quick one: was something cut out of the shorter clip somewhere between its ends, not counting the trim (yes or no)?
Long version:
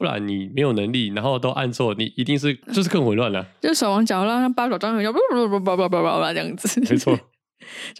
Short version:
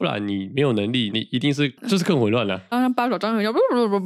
yes